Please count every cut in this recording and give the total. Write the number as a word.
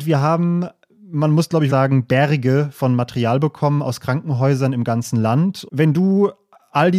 two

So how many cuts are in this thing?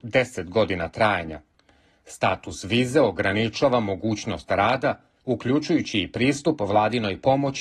one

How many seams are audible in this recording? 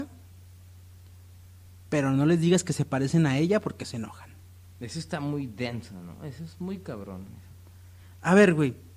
zero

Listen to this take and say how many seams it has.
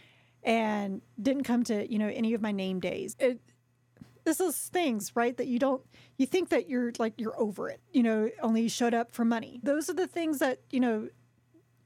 three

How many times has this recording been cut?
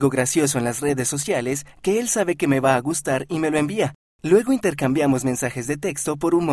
zero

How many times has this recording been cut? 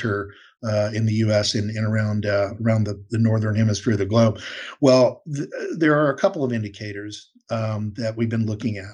zero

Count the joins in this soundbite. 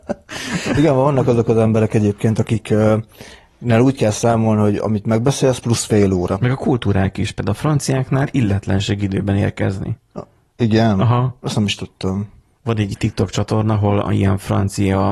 zero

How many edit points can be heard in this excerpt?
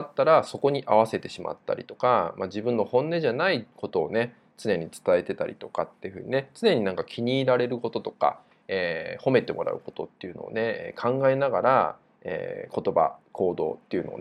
zero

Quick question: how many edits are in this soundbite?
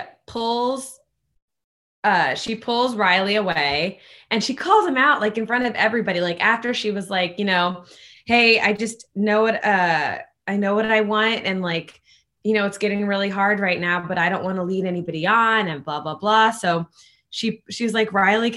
zero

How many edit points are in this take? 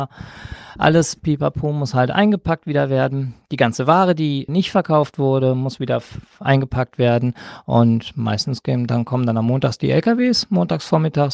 one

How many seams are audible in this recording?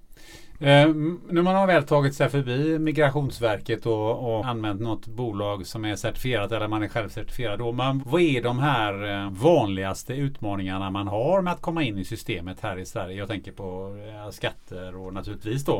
three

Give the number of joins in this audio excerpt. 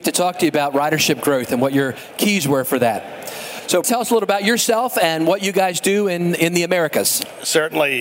one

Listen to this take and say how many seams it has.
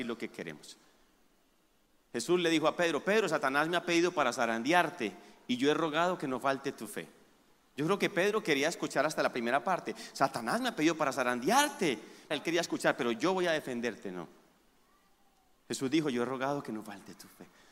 two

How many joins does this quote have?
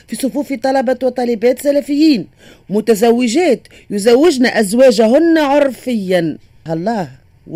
one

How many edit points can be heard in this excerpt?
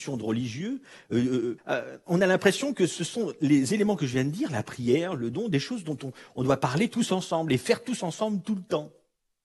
one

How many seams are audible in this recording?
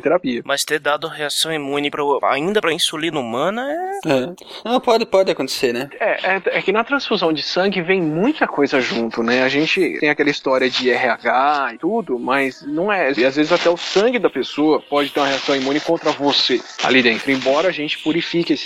two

